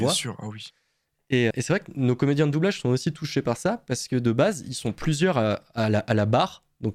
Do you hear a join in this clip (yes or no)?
yes